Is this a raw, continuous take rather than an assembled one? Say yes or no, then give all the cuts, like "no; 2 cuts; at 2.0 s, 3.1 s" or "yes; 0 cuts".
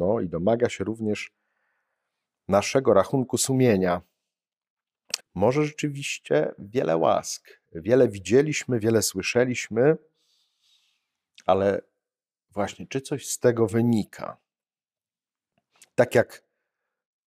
no; 1 cut; at 5.2 s